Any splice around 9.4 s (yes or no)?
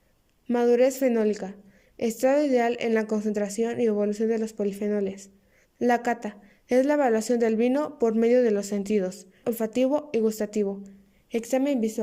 yes